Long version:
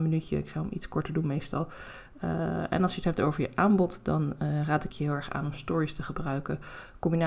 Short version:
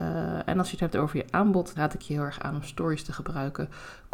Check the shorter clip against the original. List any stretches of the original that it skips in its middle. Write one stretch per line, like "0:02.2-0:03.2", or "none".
0:04.0-0:04.7